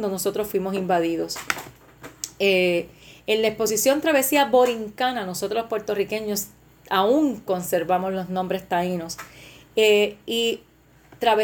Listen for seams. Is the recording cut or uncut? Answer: uncut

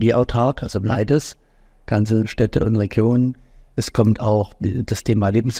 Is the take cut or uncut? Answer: uncut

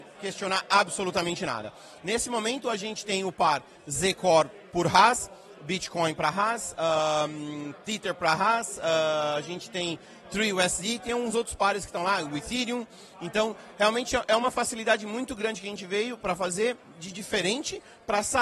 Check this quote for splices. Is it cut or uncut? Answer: uncut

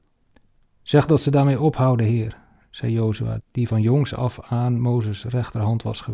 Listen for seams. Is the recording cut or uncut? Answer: cut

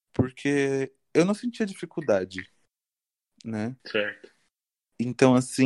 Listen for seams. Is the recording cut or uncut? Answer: cut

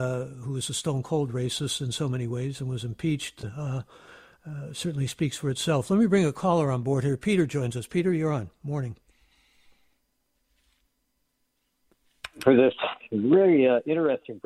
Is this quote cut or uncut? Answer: uncut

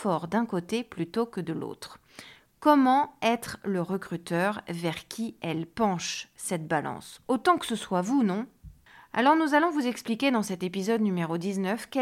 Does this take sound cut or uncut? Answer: uncut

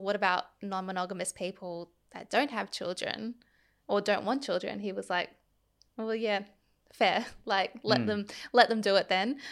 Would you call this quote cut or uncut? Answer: uncut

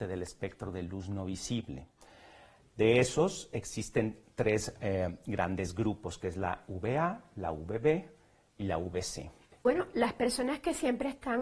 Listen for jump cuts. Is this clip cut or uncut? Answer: uncut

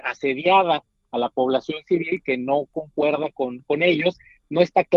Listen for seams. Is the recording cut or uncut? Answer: uncut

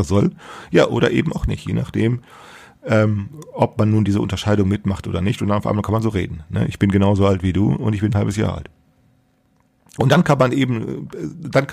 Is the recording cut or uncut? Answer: uncut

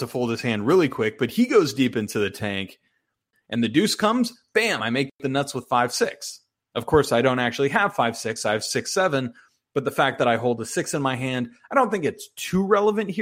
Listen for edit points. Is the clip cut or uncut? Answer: cut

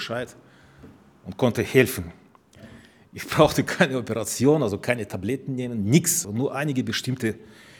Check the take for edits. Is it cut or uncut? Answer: cut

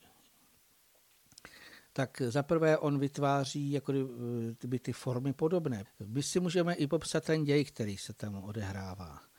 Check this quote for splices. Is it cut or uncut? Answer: cut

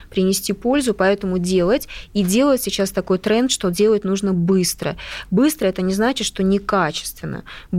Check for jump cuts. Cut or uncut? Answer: uncut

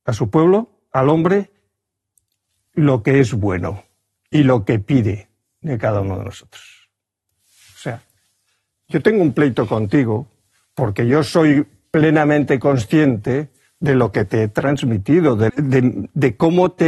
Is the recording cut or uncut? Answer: cut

